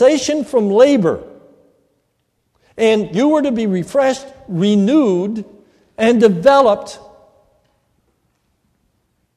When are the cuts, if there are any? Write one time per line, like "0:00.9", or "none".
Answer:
none